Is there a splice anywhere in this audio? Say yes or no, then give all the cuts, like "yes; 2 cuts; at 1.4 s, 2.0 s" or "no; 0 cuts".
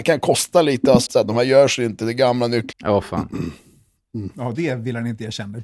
yes; 3 cuts; at 1.1 s, 2.7 s, 4.6 s